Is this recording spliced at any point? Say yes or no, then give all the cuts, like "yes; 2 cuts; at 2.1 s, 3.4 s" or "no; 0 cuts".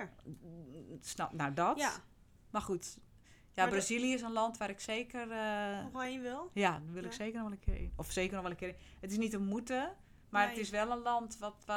yes; 1 cut; at 10.2 s